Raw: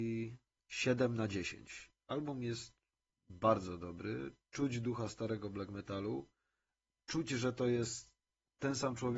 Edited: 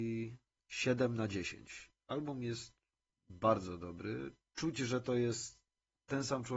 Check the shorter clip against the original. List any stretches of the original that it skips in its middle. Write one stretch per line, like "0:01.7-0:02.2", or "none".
0:04.4-0:07.0